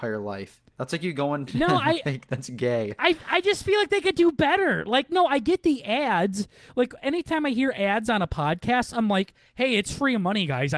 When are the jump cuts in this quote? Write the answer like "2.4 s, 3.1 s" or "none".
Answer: none